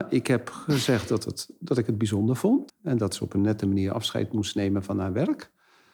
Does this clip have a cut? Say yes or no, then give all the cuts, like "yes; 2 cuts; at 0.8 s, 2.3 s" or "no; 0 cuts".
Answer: yes; 1 cut; at 2.7 s